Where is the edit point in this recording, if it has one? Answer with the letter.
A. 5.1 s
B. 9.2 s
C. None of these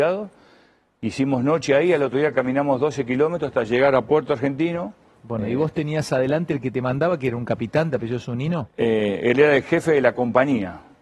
A